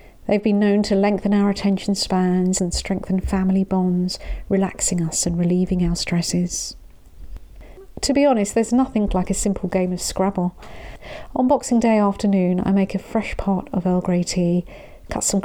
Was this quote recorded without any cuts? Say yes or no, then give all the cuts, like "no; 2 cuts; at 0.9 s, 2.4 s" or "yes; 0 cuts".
no; 2 cuts; at 2.6 s, 9.1 s